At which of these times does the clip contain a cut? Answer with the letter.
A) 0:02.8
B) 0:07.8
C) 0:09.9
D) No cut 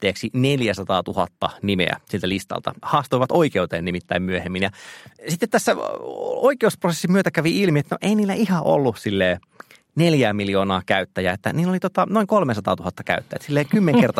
A